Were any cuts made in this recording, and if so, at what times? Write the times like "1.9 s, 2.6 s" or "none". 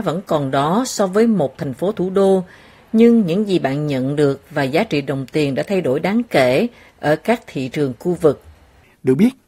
none